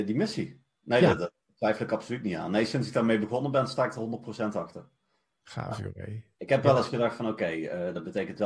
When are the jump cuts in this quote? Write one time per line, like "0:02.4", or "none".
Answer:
none